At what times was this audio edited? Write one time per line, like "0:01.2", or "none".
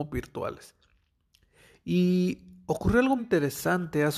0:03.2